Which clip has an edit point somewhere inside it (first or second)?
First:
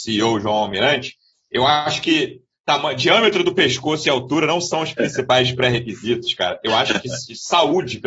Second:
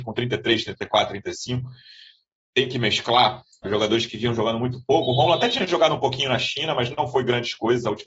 second